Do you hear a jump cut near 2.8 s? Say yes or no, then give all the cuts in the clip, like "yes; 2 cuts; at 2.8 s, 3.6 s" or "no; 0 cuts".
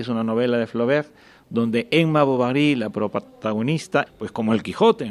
no; 1 cut; at 4.1 s